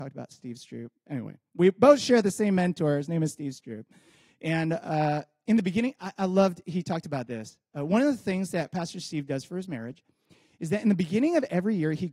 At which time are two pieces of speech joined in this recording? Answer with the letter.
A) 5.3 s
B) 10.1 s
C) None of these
C